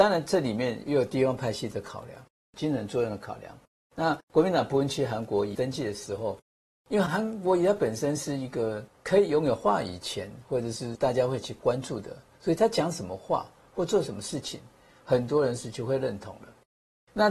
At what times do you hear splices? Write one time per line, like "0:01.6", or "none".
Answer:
0:07.1